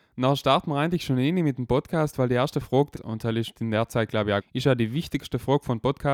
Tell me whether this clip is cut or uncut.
cut